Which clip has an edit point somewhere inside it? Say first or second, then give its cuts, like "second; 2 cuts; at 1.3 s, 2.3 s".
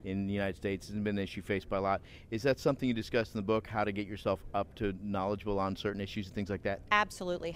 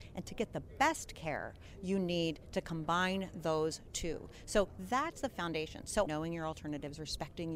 second; 1 cut; at 6.1 s